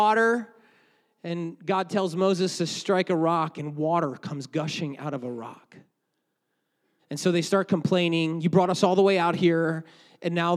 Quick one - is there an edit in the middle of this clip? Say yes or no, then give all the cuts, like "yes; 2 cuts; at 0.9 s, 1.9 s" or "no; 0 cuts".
yes; 1 cut; at 7.0 s